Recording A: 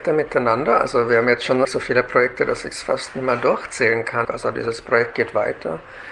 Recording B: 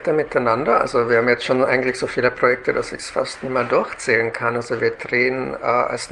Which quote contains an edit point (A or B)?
A